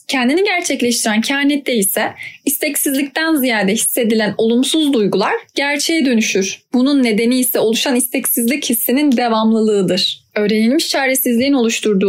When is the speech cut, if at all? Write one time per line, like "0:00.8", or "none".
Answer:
0:10.3